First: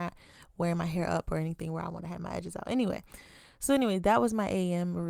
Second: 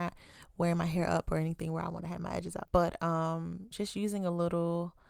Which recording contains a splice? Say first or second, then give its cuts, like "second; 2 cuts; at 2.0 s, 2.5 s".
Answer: second; 2 cuts; at 2.7 s, 3.7 s